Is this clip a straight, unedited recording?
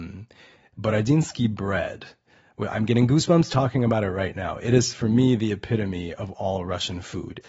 yes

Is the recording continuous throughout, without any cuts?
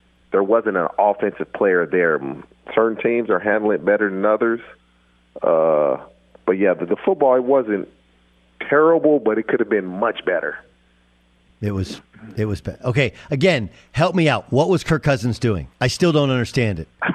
no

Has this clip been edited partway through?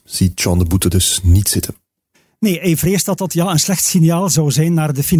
no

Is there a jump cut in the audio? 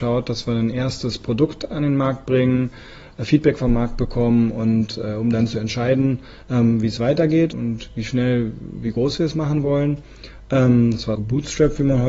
yes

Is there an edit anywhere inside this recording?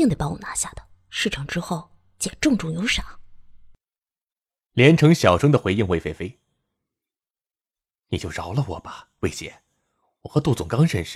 no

